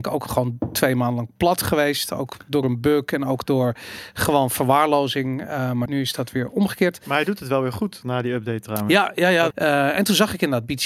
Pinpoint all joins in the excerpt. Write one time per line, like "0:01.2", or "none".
0:05.9
0:09.5